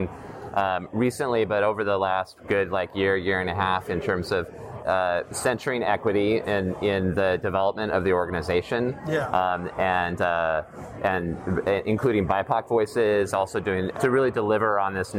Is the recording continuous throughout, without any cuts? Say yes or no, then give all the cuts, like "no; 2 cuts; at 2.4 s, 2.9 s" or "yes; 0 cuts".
no; 2 cuts; at 4.8 s, 13.9 s